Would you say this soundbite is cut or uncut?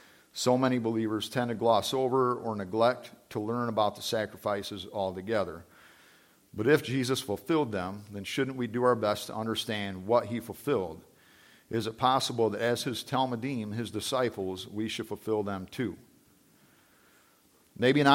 uncut